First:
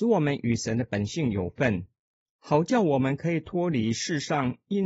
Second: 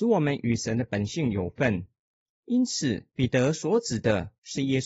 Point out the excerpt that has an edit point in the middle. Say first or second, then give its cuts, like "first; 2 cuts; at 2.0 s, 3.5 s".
second; 1 cut; at 2.3 s